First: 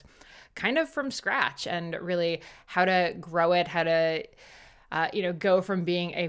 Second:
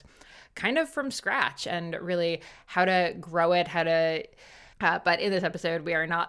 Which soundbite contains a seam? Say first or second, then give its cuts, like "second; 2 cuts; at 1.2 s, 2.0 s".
second; 1 cut; at 4.7 s